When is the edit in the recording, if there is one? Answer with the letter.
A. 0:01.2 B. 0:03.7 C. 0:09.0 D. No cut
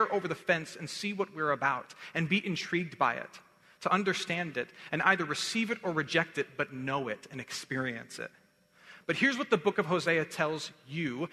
D